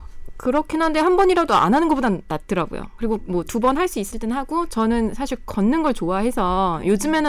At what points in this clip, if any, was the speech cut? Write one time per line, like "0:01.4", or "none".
none

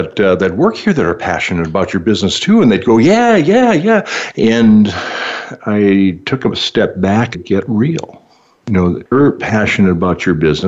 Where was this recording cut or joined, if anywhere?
0:04.3
0:07.3
0:09.1

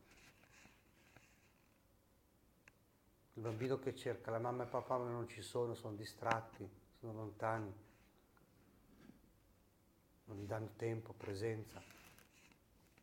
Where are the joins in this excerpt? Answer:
none

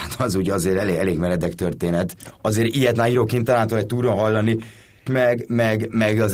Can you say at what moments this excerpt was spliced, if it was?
0:02.3
0:05.1

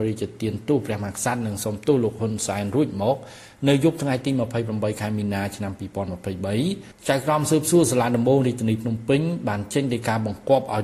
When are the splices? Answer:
none

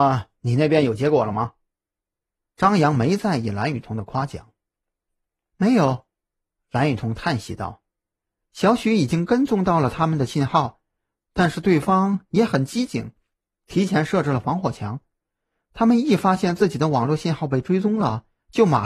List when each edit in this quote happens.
none

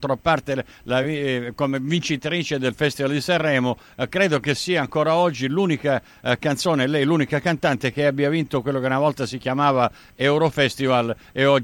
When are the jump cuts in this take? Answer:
none

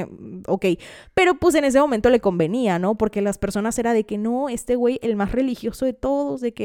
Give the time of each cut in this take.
none

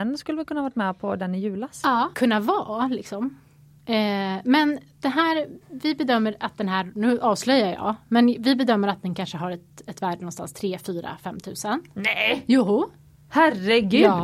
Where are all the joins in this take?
0:02.1

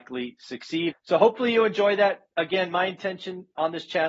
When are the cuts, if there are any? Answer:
0:00.9

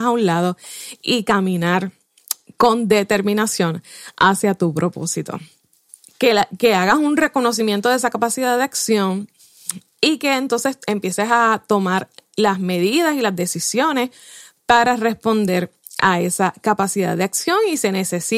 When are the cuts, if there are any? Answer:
0:06.1

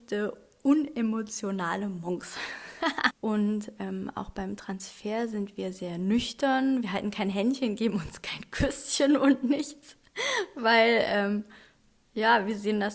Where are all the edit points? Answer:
0:03.1

